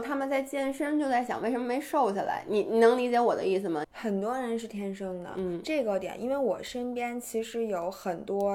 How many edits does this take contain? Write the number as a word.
one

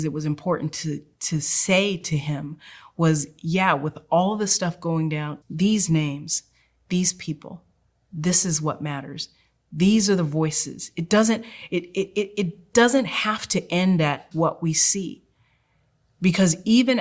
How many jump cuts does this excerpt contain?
two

